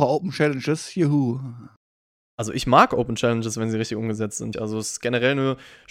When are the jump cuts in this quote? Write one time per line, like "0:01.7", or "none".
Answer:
0:04.5